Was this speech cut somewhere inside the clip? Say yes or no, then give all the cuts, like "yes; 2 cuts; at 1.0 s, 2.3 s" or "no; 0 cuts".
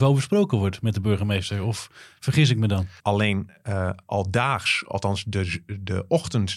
yes; 1 cut; at 3.0 s